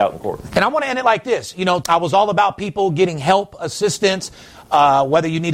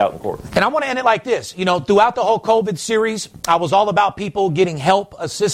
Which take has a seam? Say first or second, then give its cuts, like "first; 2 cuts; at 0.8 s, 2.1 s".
first; 1 cut; at 1.8 s